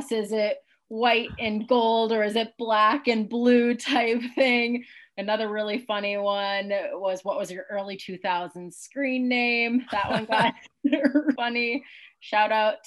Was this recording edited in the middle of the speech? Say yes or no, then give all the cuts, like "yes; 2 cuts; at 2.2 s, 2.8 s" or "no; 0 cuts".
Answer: yes; 1 cut; at 11.3 s